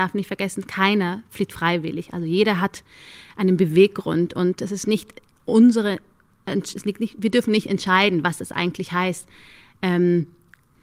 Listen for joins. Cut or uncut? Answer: uncut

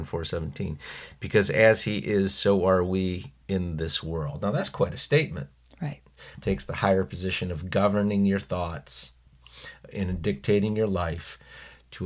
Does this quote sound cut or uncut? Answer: cut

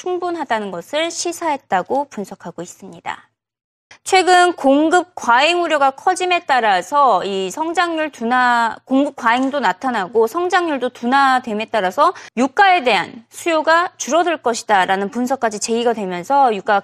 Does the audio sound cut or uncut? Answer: cut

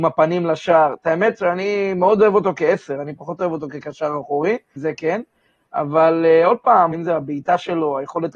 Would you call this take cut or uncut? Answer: cut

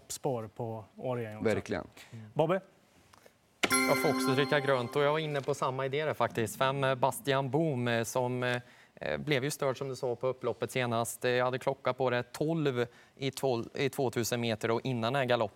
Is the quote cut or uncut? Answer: uncut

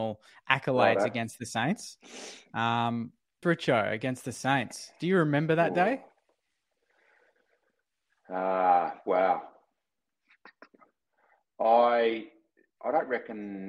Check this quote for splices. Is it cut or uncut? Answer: cut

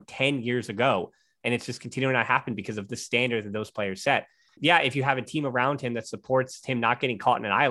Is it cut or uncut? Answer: cut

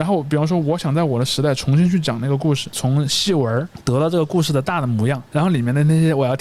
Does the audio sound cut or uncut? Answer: cut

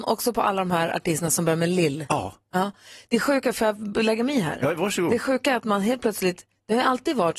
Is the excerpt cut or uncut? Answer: uncut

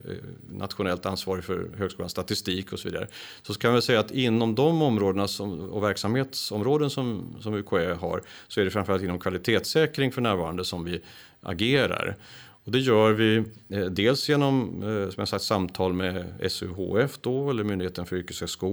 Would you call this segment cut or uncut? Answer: uncut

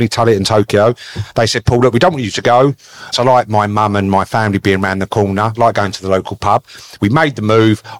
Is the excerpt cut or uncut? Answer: cut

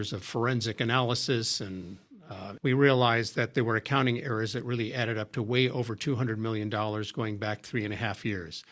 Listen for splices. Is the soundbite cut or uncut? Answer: cut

